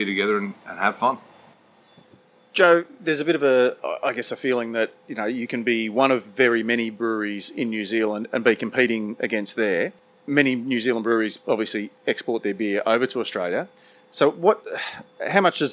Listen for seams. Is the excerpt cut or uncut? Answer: uncut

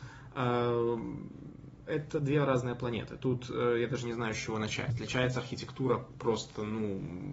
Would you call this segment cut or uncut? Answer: uncut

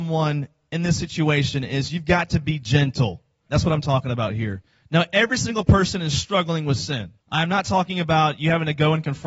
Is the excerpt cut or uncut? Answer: cut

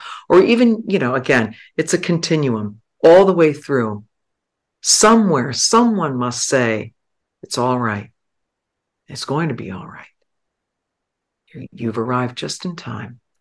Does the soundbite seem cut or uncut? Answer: cut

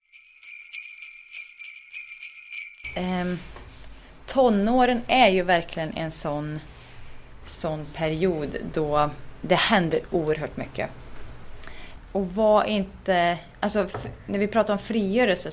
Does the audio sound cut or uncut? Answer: uncut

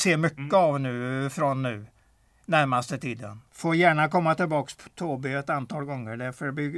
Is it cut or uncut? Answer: cut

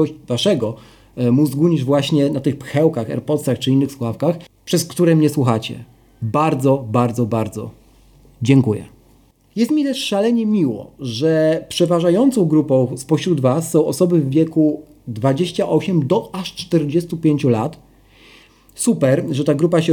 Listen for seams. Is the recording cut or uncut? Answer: uncut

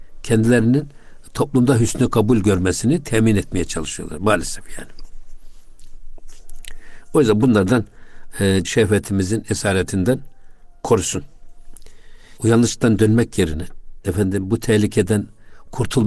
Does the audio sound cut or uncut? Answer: cut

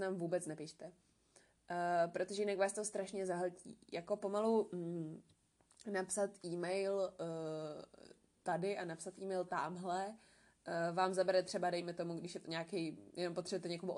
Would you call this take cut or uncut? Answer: uncut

